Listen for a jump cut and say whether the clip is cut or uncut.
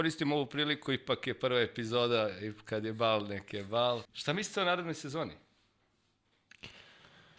cut